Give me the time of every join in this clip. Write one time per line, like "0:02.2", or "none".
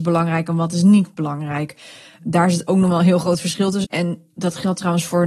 0:03.8